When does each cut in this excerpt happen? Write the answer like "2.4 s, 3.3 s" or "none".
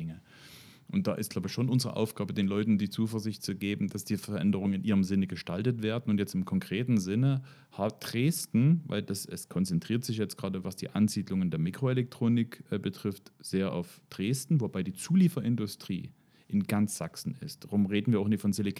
none